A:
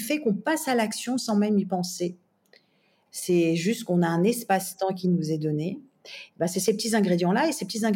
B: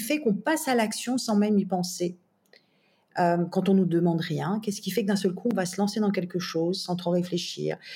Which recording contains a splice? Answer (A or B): A